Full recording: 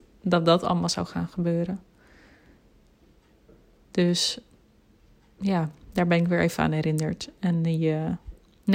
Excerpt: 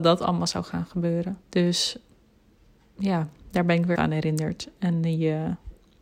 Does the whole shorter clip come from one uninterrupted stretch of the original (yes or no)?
no